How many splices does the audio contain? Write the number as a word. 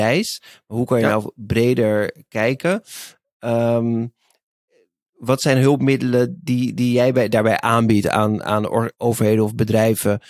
one